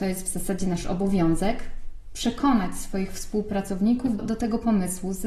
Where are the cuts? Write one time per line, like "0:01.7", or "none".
0:04.2